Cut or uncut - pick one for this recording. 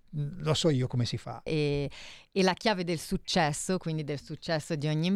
cut